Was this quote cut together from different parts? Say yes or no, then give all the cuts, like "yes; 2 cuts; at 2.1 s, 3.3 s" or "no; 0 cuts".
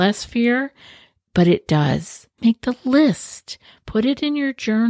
yes; 1 cut; at 2.4 s